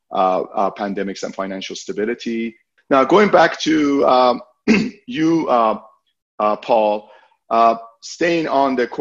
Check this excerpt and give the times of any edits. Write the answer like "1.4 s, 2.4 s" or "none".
2.8 s